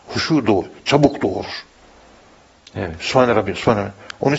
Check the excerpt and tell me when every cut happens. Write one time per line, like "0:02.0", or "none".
none